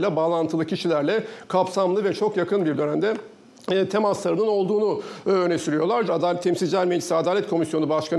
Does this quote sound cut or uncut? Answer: cut